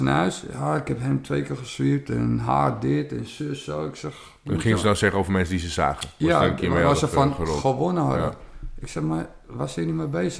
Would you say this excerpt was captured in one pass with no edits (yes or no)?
yes